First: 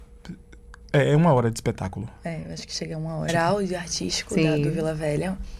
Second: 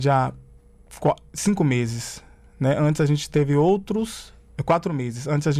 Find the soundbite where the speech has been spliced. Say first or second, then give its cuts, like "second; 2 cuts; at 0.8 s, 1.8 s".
first; 1 cut; at 3.3 s